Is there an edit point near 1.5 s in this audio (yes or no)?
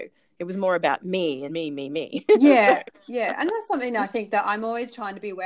no